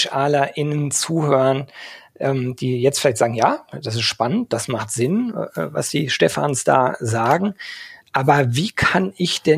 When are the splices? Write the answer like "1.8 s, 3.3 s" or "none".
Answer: none